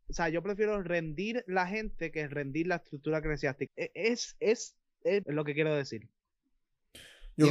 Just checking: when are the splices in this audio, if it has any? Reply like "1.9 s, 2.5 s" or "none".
3.7 s, 5.2 s